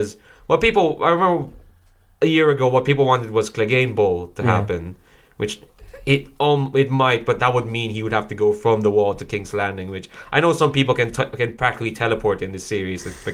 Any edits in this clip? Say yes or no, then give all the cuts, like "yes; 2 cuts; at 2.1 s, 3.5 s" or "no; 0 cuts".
no; 0 cuts